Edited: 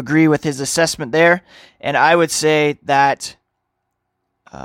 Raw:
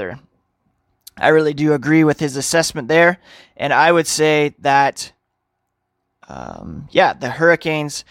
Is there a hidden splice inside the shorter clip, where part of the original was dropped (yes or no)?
no